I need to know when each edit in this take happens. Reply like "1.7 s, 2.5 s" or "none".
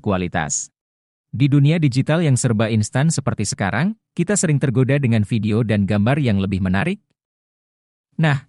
1.2 s